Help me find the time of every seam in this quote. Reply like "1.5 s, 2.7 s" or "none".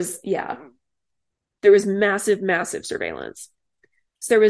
none